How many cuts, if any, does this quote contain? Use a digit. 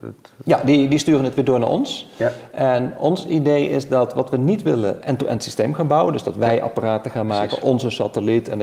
1